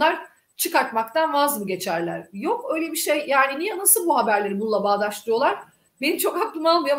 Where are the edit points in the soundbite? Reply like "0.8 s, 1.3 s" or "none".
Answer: none